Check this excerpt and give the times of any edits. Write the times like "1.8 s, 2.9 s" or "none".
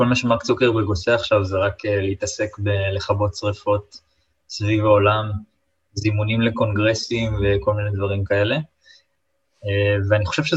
none

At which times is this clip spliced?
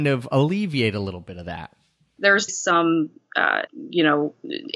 2.5 s, 3.7 s

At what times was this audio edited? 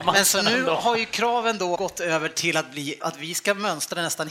1.8 s, 3.0 s

